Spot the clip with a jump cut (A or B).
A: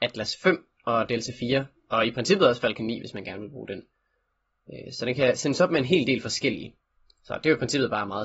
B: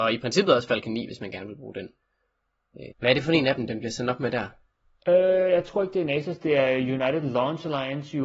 B